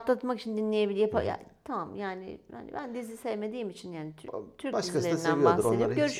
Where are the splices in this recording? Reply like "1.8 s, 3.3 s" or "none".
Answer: none